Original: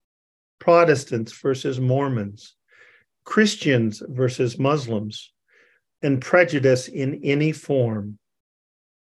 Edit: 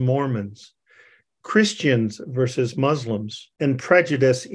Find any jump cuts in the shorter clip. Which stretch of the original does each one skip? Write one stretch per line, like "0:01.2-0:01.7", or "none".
0:05.4-0:06.0